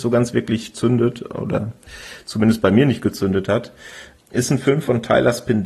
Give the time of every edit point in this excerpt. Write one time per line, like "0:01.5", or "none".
0:04.2